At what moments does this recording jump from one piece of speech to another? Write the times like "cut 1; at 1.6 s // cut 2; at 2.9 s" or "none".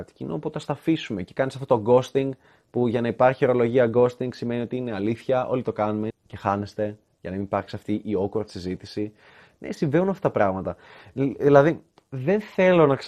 cut 1; at 6.1 s